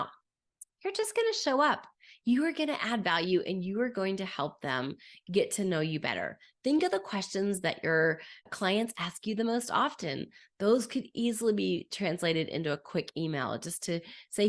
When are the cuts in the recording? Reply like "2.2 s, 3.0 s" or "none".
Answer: 8.4 s